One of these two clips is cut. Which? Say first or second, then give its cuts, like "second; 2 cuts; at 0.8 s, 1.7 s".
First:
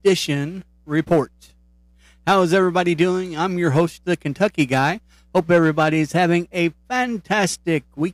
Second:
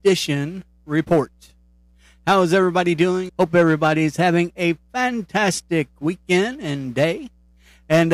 second; 1 cut; at 3.3 s